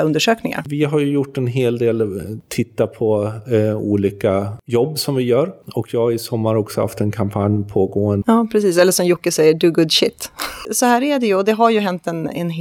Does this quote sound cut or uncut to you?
cut